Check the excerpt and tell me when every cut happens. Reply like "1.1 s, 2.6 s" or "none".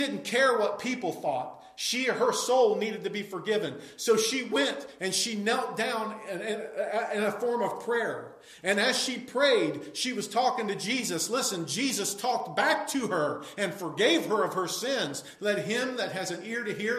15.4 s